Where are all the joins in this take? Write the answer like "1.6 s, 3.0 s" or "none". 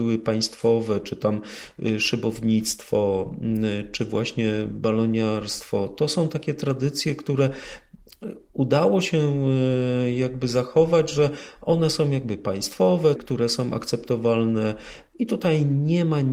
13.2 s